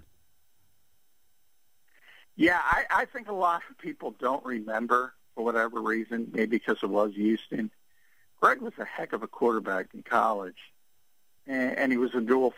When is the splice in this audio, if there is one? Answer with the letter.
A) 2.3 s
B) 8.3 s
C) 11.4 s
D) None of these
C